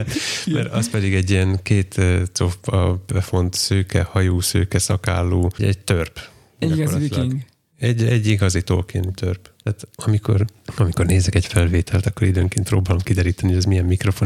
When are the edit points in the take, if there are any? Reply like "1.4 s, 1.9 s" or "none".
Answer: 5.6 s, 9.6 s